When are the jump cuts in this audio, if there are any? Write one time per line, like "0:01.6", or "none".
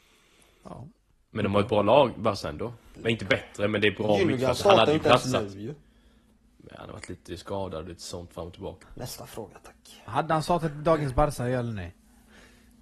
0:03.0
0:08.8